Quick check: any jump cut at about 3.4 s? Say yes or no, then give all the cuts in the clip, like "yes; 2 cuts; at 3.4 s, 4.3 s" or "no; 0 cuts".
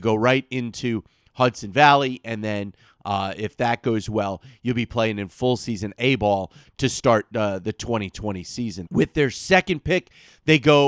no; 1 cut; at 8.9 s